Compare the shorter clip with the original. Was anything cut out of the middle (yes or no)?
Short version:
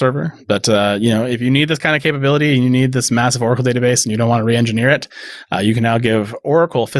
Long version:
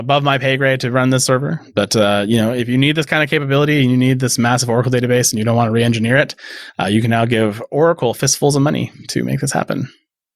no